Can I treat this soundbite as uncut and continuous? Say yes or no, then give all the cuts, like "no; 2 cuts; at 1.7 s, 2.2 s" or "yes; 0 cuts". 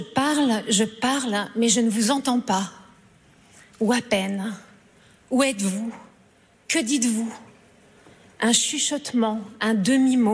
yes; 0 cuts